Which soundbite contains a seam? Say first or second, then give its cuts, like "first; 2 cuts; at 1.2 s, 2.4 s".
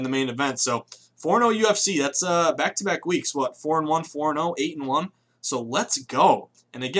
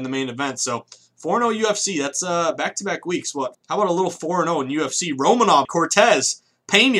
second; 2 cuts; at 3.5 s, 5.6 s